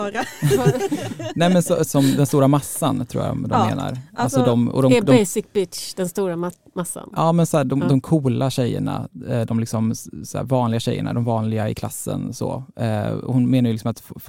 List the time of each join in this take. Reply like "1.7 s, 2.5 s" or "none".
1.9 s

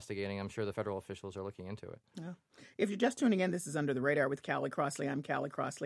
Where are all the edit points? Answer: none

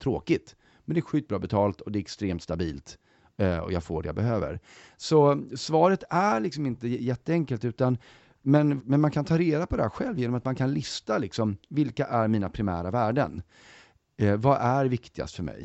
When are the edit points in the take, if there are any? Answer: 8.8 s

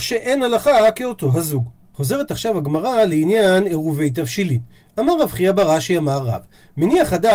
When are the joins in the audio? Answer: none

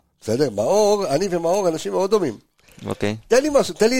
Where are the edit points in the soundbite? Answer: none

